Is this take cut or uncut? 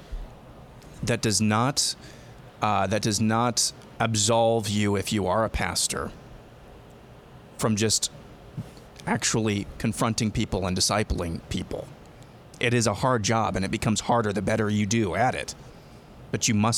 cut